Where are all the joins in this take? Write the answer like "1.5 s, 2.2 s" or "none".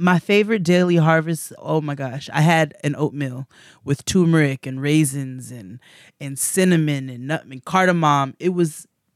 1.6 s